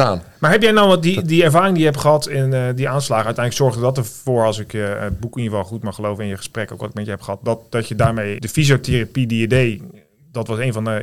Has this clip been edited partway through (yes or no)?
yes